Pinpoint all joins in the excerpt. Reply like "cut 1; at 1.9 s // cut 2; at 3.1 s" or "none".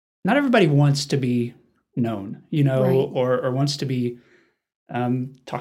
none